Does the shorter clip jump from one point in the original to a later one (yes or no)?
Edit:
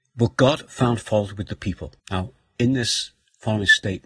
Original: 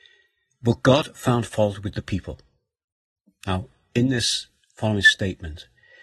yes